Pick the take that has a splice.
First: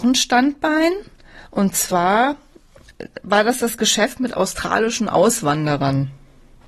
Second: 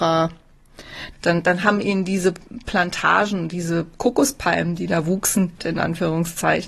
second; 2 cuts; at 1.1 s, 5.6 s

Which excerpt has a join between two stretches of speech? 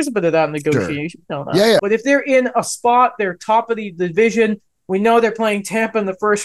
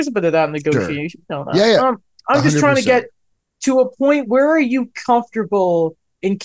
first; 1 cut; at 1.8 s

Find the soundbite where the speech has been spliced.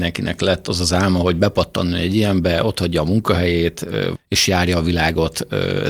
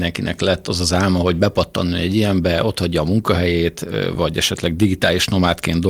first; 1 cut; at 4.1 s

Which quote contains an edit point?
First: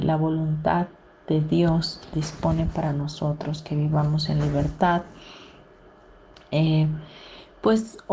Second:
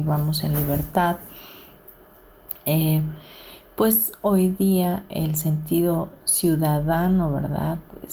first; 1 cut; at 2.1 s

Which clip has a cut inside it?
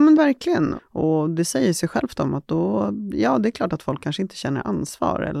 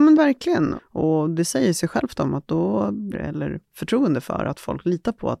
second; 1 cut; at 3.1 s

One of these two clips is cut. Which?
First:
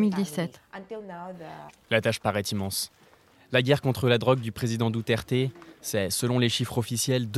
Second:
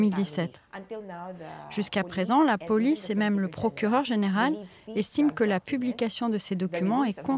first; 1 cut; at 1.7 s

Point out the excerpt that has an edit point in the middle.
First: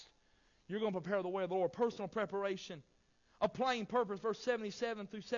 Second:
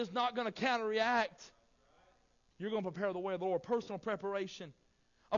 second; 1 cut; at 2.5 s

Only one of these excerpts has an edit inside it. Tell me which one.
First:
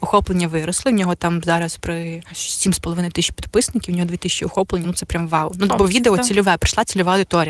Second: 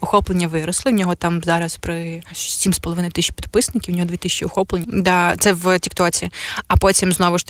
second; 1 cut; at 4.8 s

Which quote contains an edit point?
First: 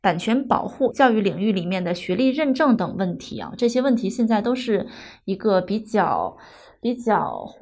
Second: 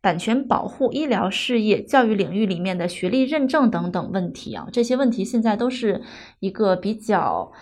first; 2 cuts; at 0.9 s, 2.8 s

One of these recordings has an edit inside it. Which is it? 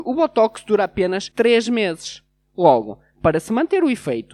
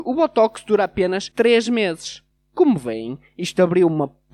second; 1 cut; at 2.3 s

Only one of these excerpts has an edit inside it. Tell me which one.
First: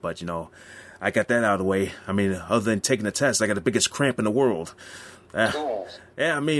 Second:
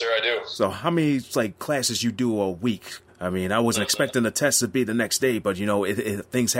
second; 1 cut; at 3.1 s

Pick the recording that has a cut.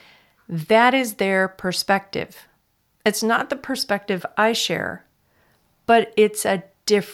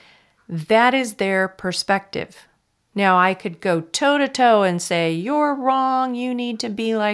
second; 1 cut; at 2.8 s

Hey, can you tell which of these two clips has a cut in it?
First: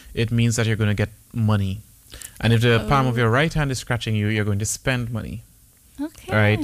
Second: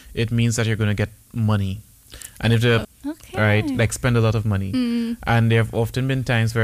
second; 1 cut; at 2.8 s

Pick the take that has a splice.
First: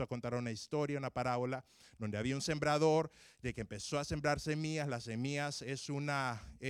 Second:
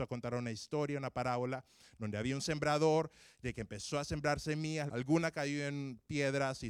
second; 1 cut; at 4.9 s

